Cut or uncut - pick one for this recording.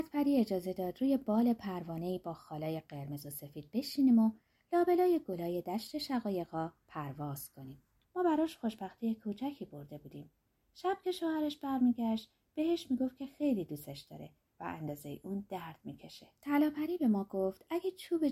cut